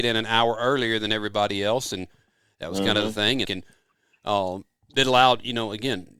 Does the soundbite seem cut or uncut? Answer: cut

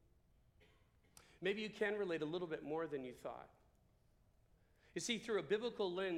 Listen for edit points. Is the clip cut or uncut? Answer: uncut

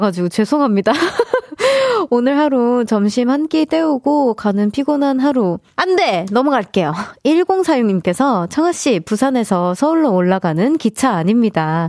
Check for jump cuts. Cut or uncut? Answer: cut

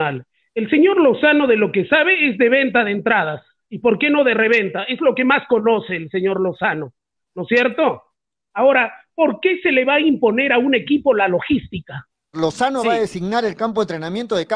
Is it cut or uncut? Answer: cut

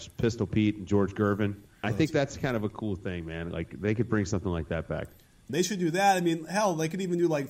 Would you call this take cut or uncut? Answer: cut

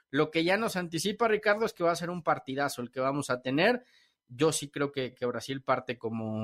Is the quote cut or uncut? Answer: uncut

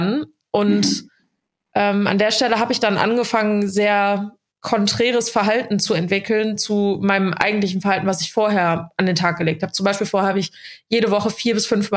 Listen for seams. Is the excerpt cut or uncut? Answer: uncut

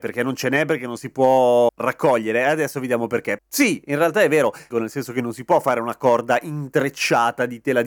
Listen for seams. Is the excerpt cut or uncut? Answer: cut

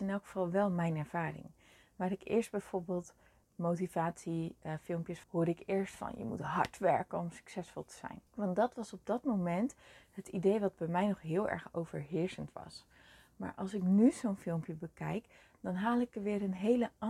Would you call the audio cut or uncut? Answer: cut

